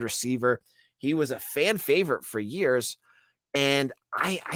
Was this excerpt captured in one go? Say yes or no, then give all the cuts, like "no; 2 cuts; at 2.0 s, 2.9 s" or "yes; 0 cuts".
no; 1 cut; at 3.4 s